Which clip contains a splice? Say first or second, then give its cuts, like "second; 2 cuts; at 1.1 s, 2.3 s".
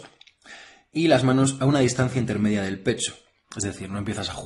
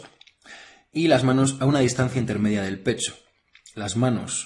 first; 1 cut; at 3.4 s